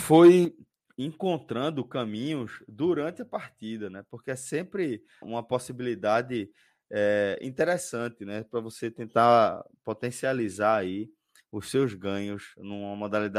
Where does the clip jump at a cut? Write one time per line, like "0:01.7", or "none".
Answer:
0:05.2